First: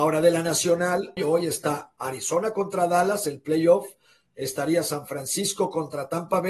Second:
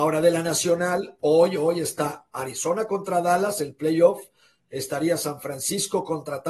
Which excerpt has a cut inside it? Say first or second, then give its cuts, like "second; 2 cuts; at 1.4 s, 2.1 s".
first; 1 cut; at 1.2 s